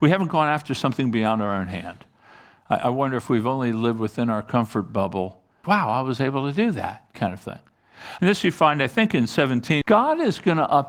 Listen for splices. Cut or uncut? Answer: cut